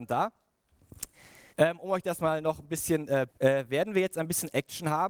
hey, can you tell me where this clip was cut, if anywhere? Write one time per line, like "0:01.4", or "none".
0:01.5
0:03.3